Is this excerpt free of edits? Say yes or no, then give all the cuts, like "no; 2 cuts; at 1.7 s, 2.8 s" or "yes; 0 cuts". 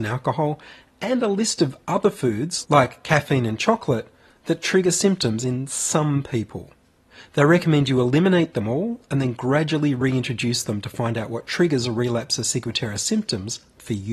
yes; 0 cuts